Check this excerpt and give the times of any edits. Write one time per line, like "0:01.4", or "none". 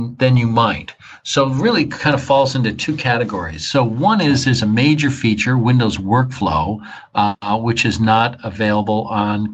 none